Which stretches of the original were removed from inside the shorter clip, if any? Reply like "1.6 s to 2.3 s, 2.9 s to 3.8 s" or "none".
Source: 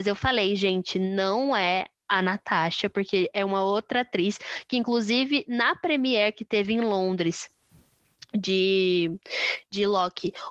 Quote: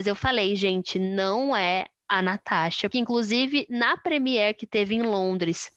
2.9 s to 4.7 s